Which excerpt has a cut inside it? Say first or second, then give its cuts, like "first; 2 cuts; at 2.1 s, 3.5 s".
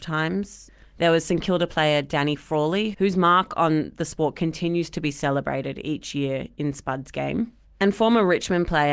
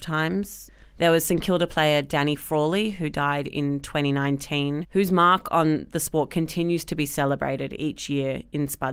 first; 1 cut; at 2.9 s